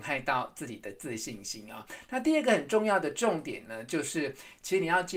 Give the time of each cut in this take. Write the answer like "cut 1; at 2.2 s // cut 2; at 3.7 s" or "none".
none